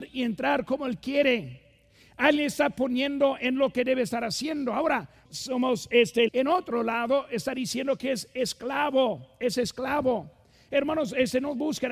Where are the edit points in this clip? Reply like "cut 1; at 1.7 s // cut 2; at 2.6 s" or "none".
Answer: cut 1; at 5.2 s // cut 2; at 6.3 s